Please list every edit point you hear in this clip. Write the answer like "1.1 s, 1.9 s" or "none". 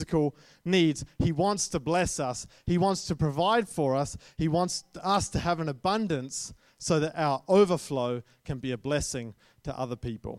none

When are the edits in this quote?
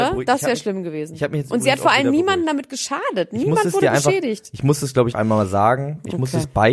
5.1 s

